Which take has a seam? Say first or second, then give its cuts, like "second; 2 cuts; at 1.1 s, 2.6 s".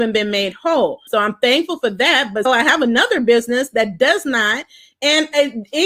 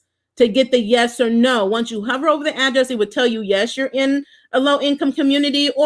first; 2 cuts; at 1.1 s, 2.5 s